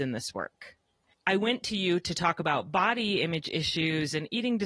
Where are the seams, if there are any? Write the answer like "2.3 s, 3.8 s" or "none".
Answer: 1.1 s